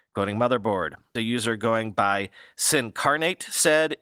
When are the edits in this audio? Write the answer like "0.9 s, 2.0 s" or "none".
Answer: 1.2 s